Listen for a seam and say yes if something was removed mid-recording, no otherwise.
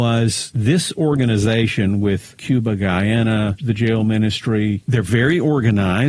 yes